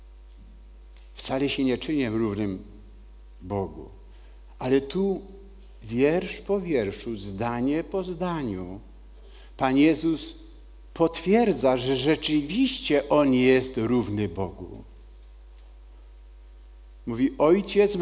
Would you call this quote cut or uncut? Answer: uncut